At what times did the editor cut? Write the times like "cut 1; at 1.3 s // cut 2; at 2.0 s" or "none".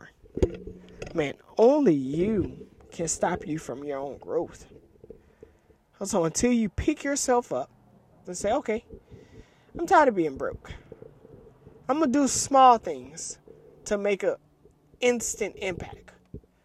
cut 1; at 8.2 s